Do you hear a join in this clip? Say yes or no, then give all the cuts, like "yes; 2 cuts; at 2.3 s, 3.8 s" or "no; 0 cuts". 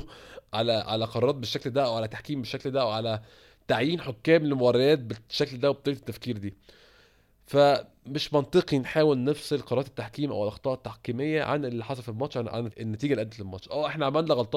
yes; 1 cut; at 12.7 s